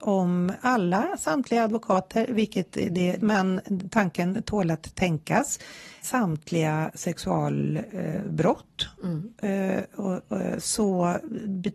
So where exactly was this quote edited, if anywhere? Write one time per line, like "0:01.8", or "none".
0:03.2
0:06.0